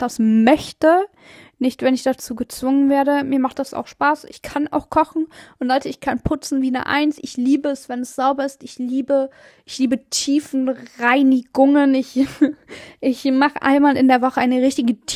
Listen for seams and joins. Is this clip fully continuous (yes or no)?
yes